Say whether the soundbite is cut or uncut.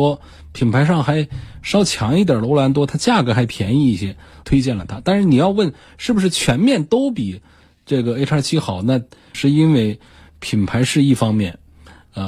cut